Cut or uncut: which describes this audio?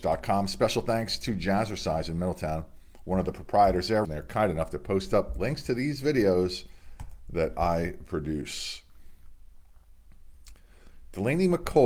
cut